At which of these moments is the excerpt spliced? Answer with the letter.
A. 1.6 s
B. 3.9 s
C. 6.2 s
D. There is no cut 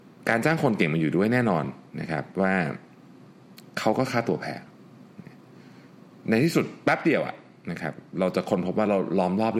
D